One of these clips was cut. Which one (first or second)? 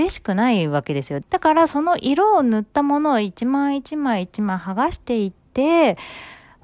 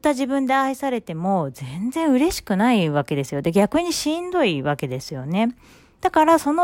first